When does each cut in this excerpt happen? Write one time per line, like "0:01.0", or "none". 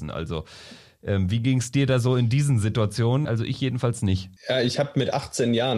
0:03.3
0:04.4

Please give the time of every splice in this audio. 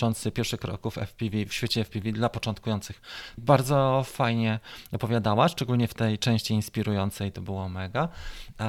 0:03.4

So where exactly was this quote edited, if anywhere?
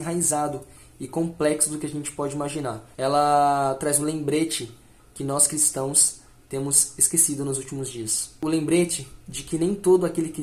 0:02.9

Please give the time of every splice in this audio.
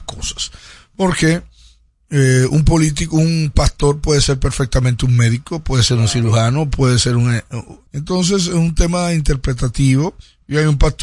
0:07.9

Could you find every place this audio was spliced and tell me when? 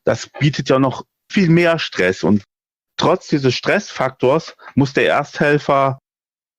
0:01.3
0:02.9

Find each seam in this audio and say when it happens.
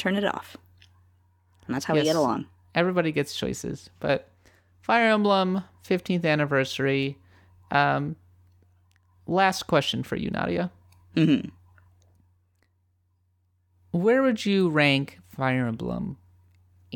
none

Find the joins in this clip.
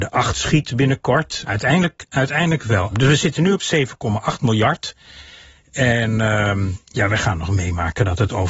0:01.4
0:02.9

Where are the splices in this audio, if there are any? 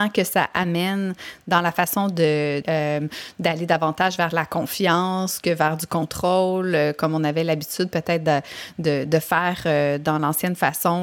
0:02.6

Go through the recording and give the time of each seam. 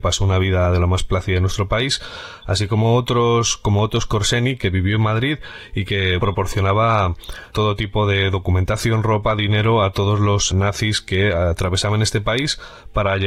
0:06.2
0:07.5
0:10.5

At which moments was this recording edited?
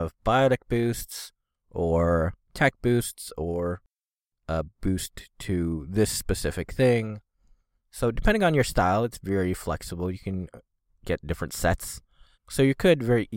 0:12.3

